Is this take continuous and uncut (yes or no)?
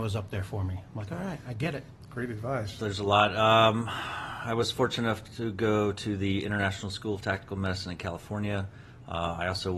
no